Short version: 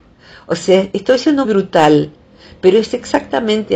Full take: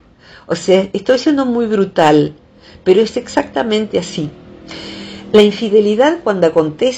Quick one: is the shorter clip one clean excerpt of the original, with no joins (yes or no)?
no